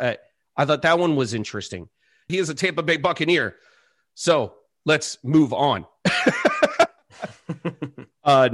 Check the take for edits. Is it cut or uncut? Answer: cut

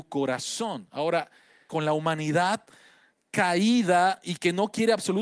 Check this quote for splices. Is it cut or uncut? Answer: cut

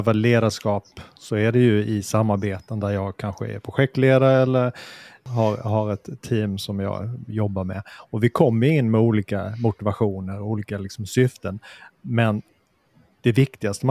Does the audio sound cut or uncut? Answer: uncut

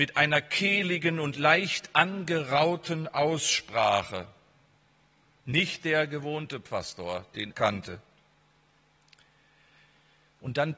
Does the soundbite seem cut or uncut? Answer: cut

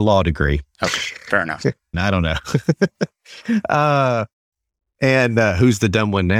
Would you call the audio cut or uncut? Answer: cut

